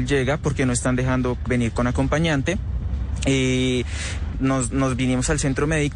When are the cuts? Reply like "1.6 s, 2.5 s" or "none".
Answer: 1.5 s, 4.3 s